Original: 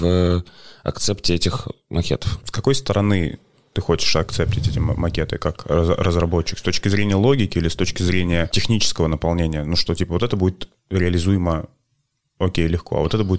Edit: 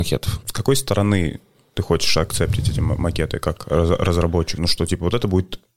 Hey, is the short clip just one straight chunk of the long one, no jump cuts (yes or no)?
no